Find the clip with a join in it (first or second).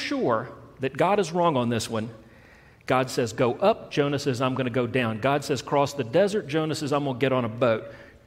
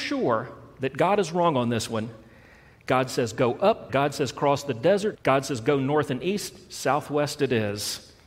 second